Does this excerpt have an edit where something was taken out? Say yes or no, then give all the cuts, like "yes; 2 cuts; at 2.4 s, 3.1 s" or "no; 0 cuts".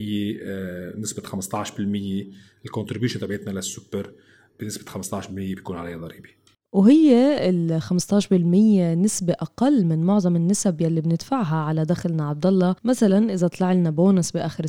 no; 0 cuts